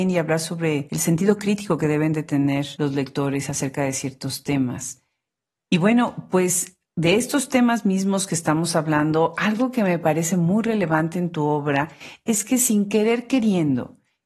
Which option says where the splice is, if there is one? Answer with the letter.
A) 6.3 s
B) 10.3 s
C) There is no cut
C